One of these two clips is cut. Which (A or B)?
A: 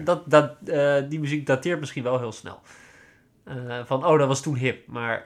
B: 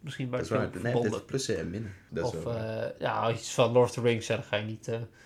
B